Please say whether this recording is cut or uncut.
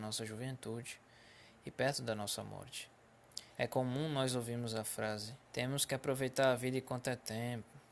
cut